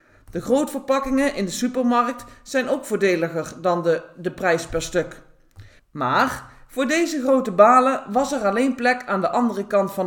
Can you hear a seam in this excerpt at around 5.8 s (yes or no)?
yes